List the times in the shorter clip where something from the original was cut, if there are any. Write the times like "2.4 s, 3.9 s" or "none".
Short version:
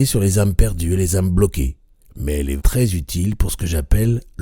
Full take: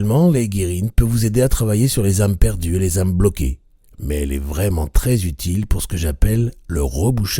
2.6 s